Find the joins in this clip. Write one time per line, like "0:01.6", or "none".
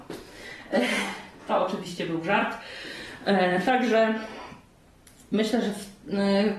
none